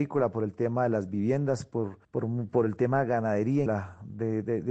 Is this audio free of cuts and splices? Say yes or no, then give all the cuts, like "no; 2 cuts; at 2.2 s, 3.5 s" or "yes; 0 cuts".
no; 2 cuts; at 2.0 s, 3.7 s